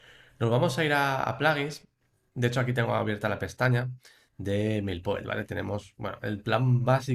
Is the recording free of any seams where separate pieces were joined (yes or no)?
yes